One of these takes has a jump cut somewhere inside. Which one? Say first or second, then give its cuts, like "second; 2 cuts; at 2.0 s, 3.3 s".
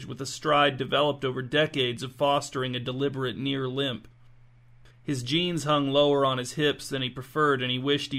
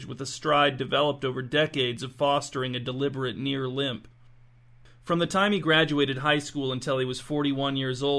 first; 1 cut; at 4.9 s